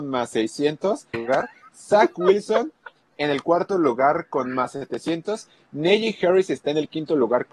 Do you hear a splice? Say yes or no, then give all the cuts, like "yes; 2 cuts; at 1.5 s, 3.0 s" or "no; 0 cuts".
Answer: yes; 1 cut; at 1.1 s